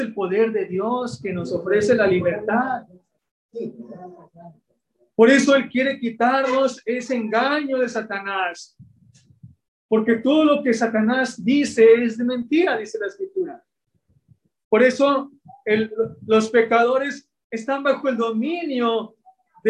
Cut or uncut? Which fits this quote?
uncut